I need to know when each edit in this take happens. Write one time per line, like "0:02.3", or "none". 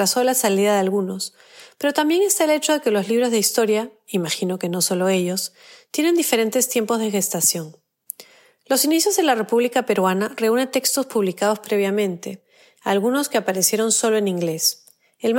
none